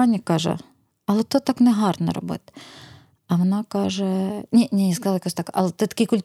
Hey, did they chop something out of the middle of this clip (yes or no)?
no